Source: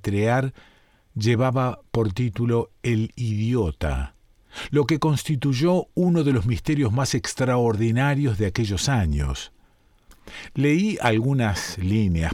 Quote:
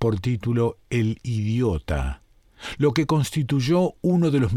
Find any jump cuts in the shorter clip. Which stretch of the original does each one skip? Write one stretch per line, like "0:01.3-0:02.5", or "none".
none